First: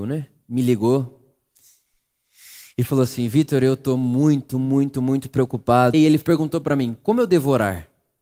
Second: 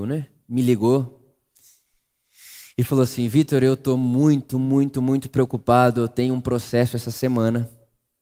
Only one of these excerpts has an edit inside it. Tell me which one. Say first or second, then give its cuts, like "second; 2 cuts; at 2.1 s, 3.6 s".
first; 1 cut; at 5.9 s